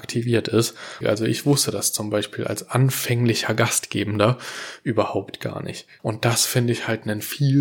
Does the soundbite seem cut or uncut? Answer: cut